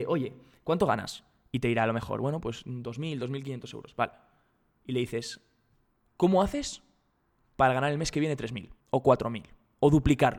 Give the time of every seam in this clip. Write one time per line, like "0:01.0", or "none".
0:06.1
0:08.8